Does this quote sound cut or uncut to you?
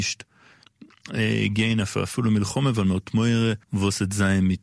cut